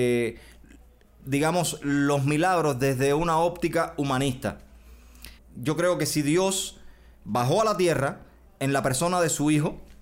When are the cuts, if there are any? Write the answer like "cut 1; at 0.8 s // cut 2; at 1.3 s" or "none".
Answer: cut 1; at 5.4 s